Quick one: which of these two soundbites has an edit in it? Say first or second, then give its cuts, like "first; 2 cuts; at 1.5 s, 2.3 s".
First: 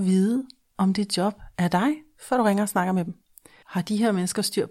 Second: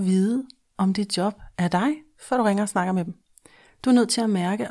first; 1 cut; at 3.6 s